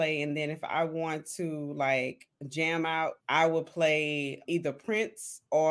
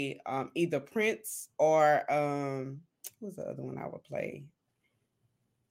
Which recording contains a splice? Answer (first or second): first